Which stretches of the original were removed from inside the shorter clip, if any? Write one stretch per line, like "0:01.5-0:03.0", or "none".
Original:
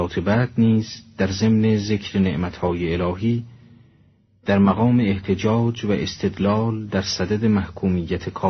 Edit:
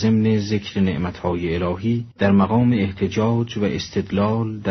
0:03.5-0:04.4